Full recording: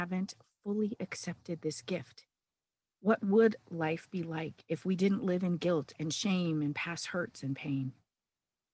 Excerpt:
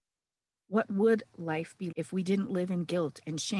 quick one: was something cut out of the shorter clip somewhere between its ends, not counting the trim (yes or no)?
yes